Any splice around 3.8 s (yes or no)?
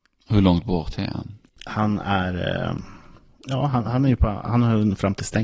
no